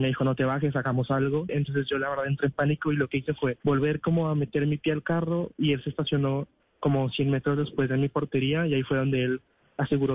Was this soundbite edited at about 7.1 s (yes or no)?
no